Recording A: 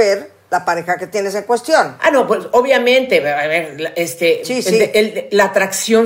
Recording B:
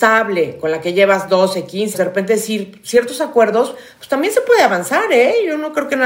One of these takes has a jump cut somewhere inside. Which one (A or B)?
B